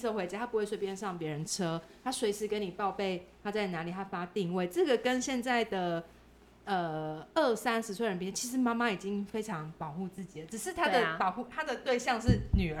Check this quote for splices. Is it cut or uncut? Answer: uncut